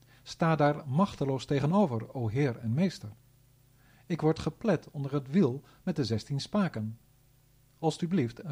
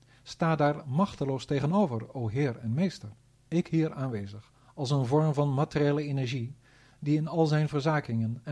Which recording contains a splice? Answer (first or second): second